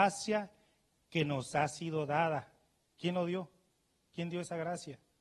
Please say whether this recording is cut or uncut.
uncut